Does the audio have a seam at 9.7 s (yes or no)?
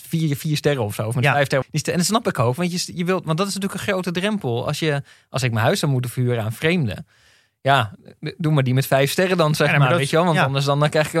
no